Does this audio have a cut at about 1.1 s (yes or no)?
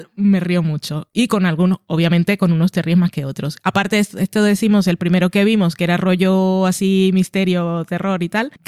no